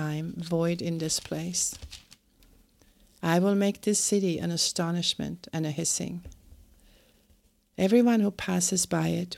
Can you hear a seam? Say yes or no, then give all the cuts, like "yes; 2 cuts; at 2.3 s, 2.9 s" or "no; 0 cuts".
yes; 1 cut; at 3.2 s